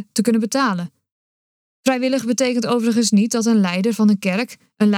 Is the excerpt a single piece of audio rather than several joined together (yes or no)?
no